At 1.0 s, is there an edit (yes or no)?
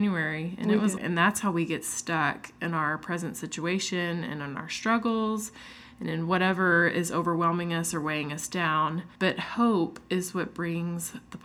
yes